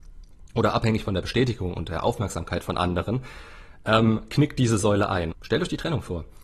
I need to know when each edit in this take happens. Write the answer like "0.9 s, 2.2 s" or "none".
5.3 s